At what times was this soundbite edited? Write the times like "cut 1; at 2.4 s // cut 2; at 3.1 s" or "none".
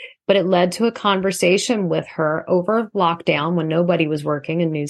none